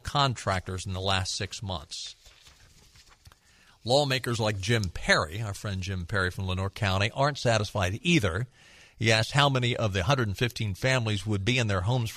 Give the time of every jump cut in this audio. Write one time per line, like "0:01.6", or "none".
none